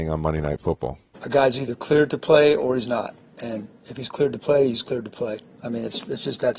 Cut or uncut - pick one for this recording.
uncut